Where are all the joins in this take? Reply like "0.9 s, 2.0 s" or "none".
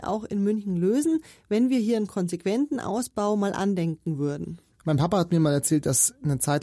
4.8 s